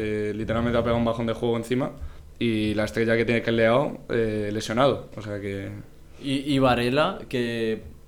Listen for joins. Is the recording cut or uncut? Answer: uncut